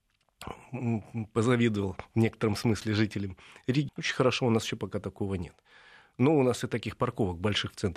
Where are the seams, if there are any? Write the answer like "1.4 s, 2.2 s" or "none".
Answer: 3.9 s